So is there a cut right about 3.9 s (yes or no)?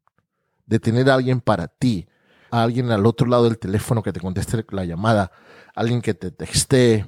no